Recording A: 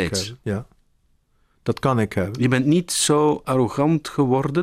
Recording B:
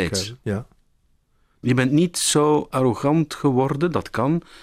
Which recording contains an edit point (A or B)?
B